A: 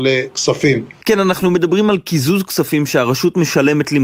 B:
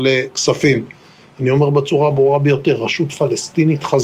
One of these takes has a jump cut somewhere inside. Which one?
A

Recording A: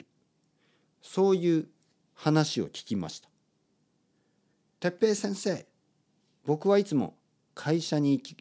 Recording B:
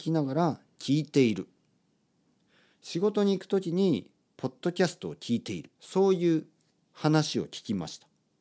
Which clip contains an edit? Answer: B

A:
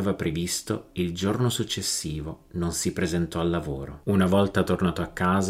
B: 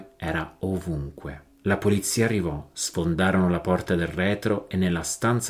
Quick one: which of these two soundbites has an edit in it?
A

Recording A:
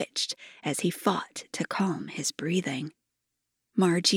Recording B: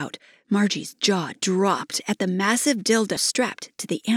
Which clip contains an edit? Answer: B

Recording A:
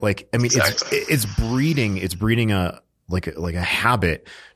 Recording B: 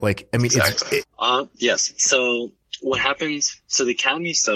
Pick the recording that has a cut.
B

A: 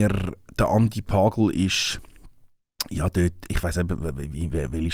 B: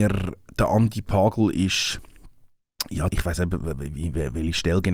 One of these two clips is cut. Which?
B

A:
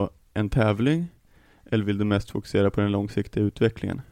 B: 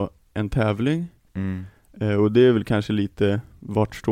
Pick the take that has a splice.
B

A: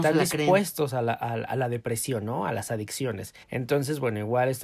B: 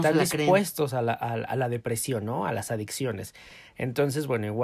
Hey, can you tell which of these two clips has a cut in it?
A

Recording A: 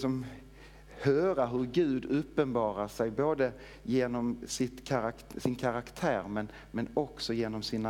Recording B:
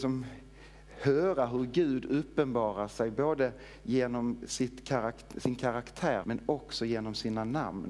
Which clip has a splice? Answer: B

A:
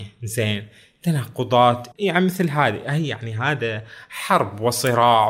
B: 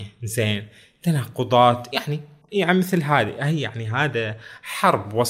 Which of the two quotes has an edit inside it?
A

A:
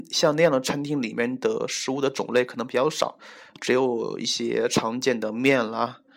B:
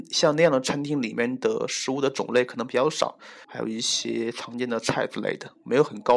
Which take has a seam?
B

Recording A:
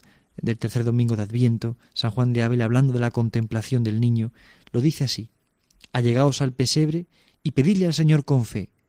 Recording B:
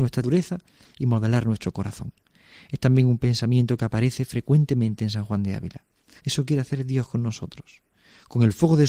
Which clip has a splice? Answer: B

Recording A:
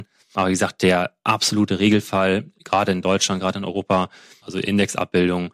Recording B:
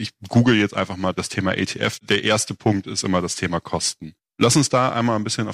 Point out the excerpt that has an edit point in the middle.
A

